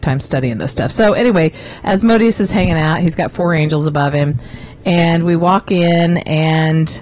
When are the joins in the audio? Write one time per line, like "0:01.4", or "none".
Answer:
none